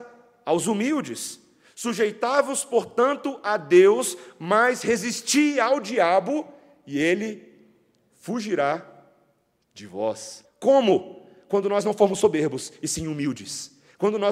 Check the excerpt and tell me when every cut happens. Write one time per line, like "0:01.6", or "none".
0:10.4